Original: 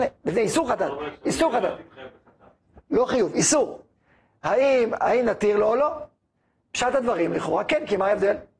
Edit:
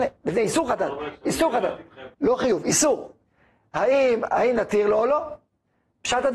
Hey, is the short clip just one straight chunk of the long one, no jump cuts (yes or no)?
no